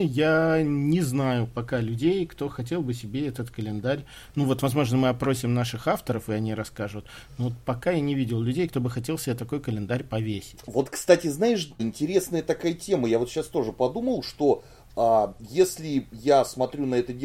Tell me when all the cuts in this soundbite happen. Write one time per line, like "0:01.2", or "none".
0:11.8